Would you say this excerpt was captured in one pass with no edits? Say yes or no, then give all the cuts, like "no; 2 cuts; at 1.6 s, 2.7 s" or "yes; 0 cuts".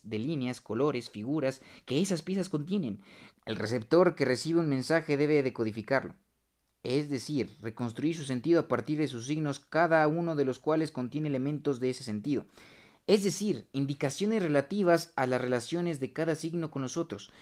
no; 1 cut; at 3.3 s